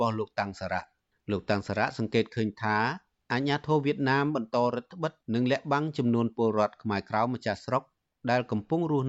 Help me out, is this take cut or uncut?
uncut